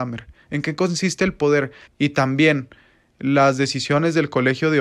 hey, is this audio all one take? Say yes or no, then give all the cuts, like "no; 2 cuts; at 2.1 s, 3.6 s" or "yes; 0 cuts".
no; 1 cut; at 1.8 s